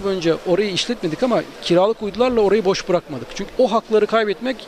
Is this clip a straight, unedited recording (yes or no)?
no